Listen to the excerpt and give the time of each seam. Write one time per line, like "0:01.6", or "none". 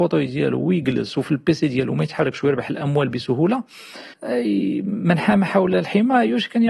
0:04.1